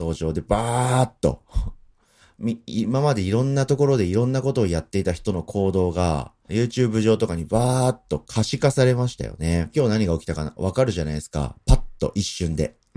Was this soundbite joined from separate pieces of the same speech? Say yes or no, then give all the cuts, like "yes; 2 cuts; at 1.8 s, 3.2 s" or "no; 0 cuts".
yes; 2 cuts; at 6.5 s, 9.7 s